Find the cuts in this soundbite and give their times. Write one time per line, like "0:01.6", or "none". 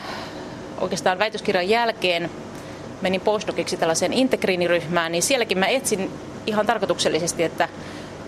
none